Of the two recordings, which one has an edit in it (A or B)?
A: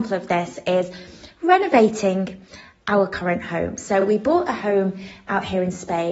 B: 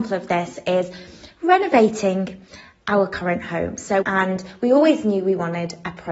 B